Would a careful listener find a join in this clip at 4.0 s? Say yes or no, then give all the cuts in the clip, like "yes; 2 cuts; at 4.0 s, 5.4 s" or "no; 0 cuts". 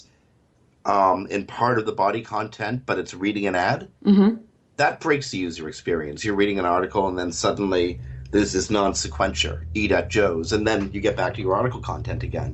yes; 1 cut; at 4.0 s